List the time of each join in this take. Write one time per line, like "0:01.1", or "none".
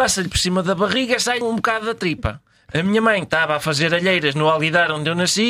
0:01.4